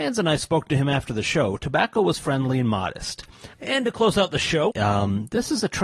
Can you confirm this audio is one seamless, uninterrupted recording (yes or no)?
no